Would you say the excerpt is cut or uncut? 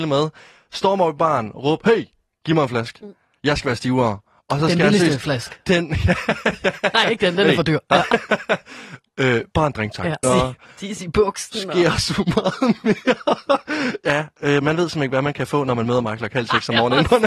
cut